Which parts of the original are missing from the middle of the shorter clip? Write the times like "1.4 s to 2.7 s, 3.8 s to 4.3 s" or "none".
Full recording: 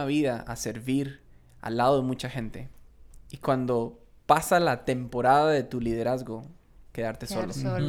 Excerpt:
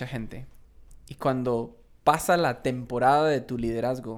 none